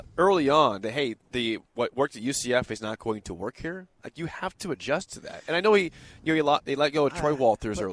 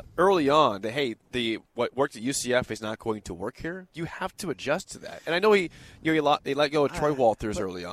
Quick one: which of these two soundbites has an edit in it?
second; 1 cut; at 3.9 s

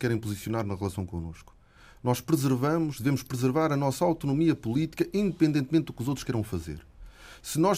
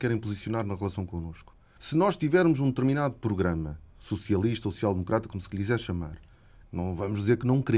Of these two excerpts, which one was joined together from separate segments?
second; 2 cuts; at 1.8 s, 6.6 s

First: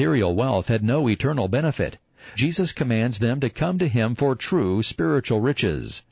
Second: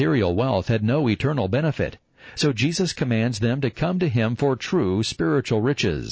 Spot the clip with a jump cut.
first; 1 cut; at 2.3 s

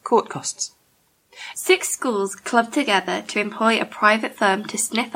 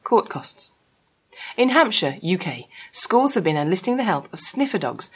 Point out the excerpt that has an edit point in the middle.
first; 1 cut; at 1.5 s

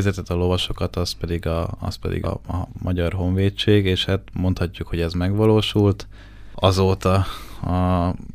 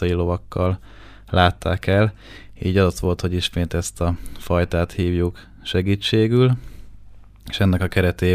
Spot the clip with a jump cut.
first; 1 cut; at 2.2 s

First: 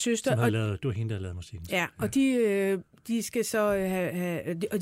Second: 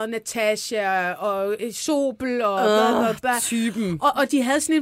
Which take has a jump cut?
second; 1 cut; at 1.6 s

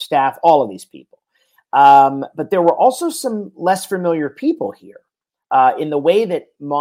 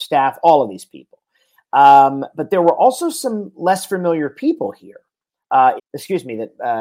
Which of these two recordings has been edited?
second; 1 cut; at 5.8 s

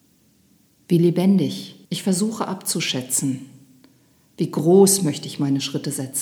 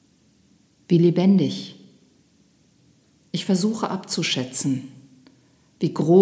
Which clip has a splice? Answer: first; 1 cut; at 1.8 s

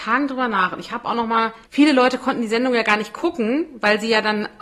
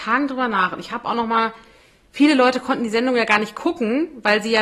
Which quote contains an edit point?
first; 1 cut; at 1.6 s

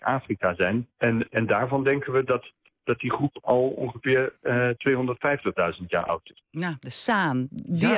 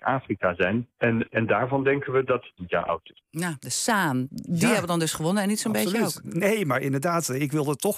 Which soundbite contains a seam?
second; 1 cut; at 2.6 s

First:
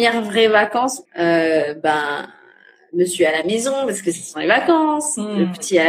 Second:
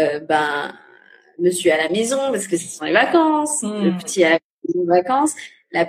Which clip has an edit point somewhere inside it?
first; 1 cut; at 1.0 s

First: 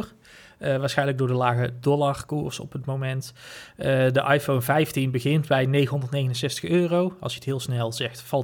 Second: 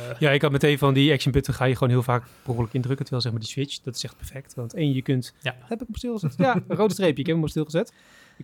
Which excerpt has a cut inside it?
second; 1 cut; at 5.7 s

